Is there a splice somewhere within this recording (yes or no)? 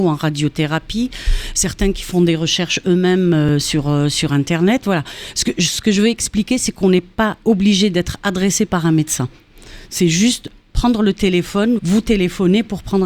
yes